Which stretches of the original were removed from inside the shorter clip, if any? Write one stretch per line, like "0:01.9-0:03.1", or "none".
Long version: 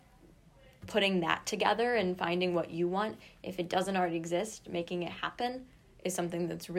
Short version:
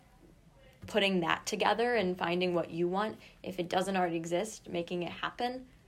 none